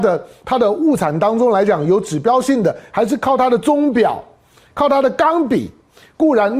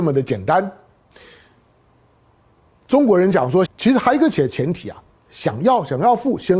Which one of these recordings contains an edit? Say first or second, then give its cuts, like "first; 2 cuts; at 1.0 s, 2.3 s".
second; 1 cut; at 3.7 s